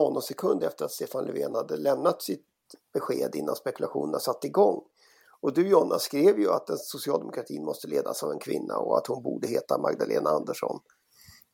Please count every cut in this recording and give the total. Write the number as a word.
zero